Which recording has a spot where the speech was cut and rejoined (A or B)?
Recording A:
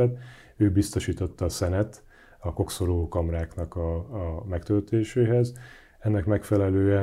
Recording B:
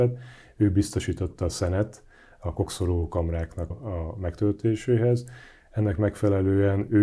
B